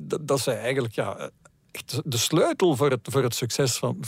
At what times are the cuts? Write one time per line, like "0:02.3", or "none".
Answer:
none